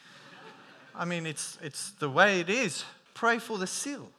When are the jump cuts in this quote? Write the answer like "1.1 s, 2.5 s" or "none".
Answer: 3.1 s